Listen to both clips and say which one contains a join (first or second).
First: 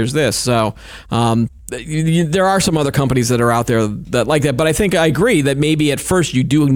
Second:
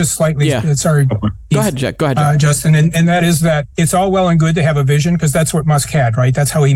second